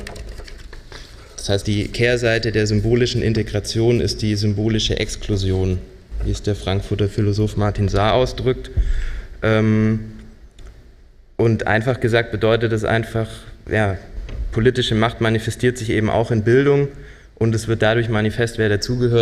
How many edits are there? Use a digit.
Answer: 1